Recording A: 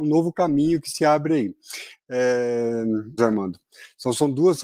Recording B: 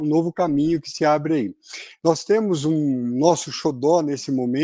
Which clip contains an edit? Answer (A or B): A